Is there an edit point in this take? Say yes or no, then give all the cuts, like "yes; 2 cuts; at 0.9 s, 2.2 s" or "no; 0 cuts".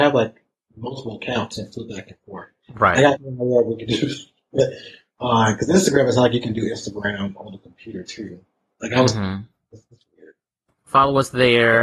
yes; 1 cut; at 10.7 s